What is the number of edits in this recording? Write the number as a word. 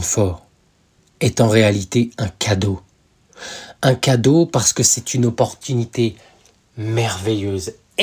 zero